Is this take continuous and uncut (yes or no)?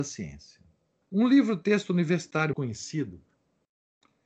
no